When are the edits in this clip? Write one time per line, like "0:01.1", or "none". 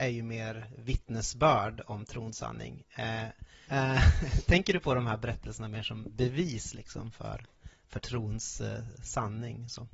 0:03.7

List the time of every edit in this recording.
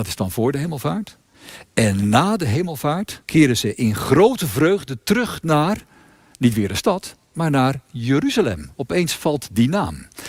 0:03.2

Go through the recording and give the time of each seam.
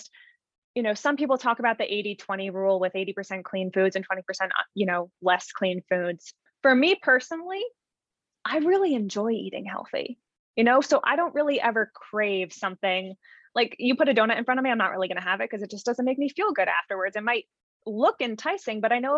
0:06.5

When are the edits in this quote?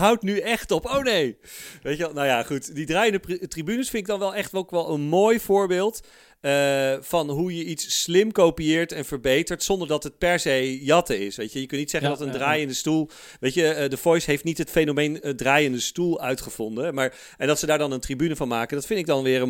none

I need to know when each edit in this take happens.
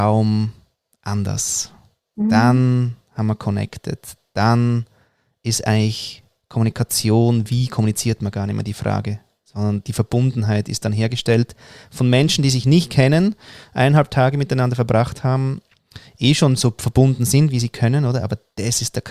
none

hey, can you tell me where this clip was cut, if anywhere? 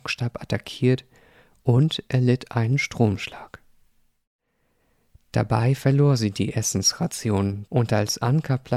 0:07.7

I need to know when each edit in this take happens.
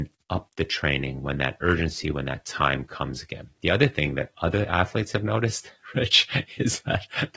none

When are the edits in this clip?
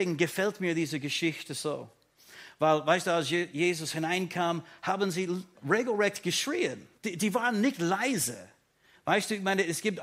0:06.9

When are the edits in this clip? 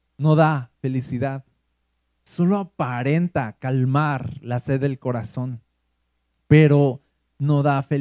none

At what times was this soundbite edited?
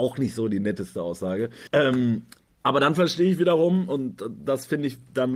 0:01.7

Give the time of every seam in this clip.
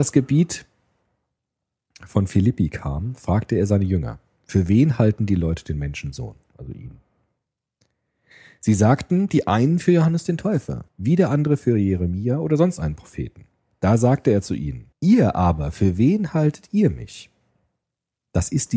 0:10.9
0:14.9

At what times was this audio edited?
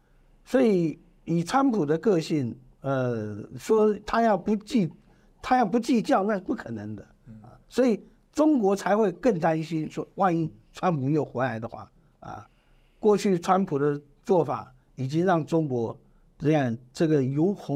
none

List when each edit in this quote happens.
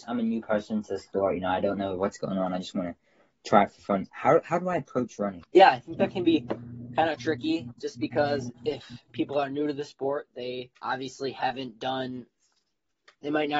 0:05.4
0:10.7

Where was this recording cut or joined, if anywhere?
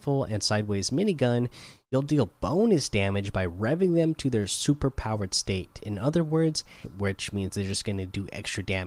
0:06.8

